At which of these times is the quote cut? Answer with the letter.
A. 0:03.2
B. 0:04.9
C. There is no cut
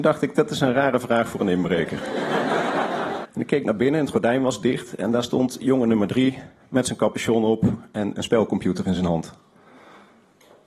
A